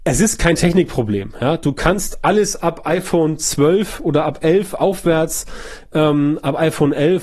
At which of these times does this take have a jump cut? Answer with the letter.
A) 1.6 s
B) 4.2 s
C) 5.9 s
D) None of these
D